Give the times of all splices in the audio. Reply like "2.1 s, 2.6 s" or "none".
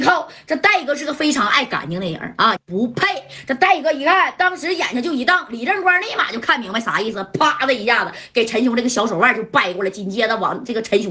2.6 s